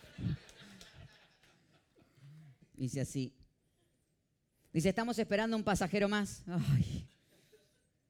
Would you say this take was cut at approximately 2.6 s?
yes; 1 cut; at 2.6 s

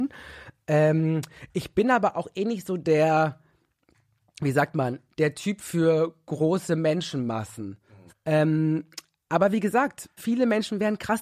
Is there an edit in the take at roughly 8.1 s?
yes; 2 cuts; at 8.1 s, 10.2 s

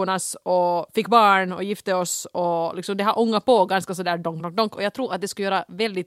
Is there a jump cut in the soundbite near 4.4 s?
yes; 1 cut; at 4.4 s

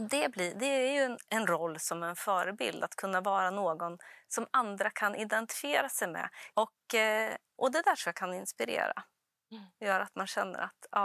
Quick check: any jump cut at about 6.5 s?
yes; 1 cut; at 6.5 s

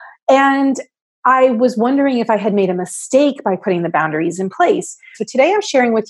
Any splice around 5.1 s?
yes; 1 cut; at 5.1 s

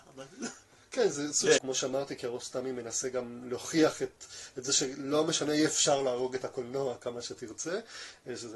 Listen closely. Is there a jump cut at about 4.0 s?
no; 1 cut; at 1.6 s

